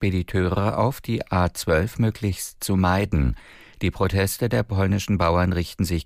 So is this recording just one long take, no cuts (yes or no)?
yes